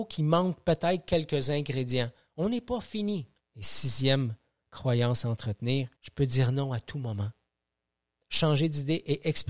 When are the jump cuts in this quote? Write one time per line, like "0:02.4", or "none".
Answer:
0:03.4
0:06.0